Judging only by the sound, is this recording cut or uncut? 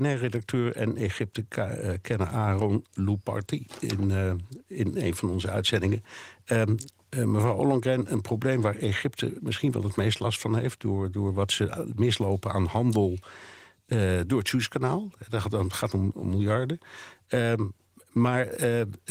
uncut